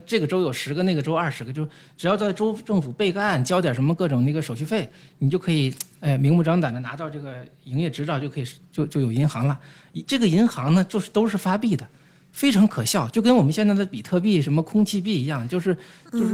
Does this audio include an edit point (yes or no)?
no